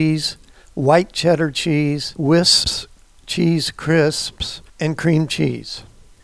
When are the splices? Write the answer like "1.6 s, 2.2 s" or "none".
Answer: 4.7 s